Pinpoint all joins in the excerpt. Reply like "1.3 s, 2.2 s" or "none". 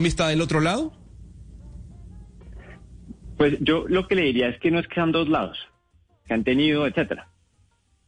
6.3 s